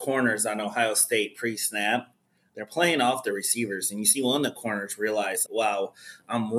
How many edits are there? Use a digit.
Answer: 1